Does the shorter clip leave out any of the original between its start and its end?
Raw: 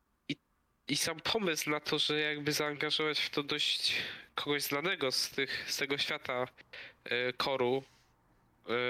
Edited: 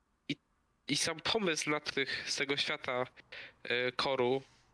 yes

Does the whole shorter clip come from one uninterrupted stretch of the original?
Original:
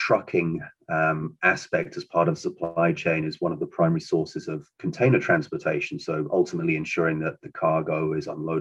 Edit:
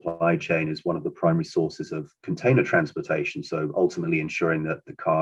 yes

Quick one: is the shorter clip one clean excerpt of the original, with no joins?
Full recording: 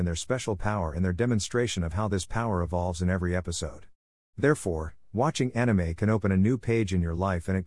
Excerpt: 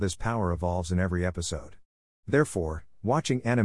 yes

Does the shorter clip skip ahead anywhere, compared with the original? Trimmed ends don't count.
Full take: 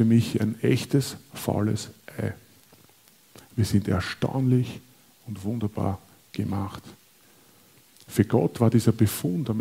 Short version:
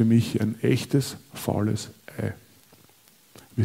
no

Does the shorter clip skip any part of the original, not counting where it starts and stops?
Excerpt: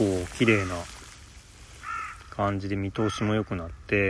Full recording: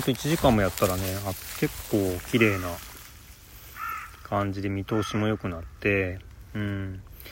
no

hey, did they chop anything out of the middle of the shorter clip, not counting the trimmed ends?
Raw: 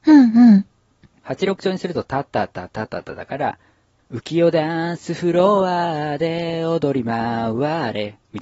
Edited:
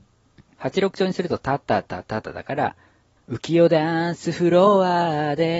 yes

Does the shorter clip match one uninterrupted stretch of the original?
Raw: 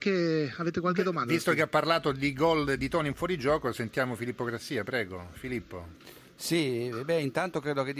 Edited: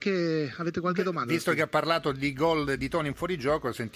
yes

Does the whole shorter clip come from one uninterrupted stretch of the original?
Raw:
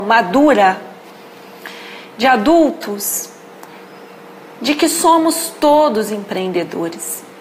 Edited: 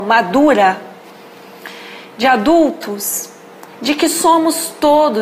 no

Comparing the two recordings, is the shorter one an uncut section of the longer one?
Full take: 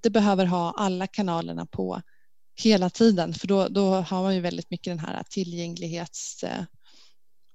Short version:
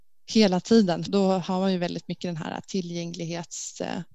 no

